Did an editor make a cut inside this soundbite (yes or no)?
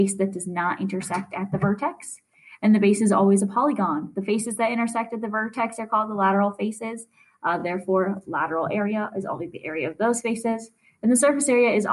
no